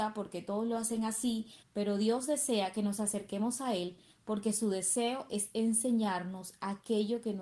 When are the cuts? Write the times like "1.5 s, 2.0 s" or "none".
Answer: 1.6 s